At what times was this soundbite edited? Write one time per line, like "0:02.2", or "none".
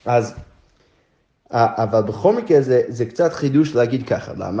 none